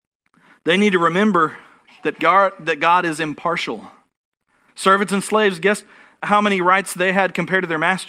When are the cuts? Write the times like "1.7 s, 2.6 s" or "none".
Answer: 4.7 s, 6.2 s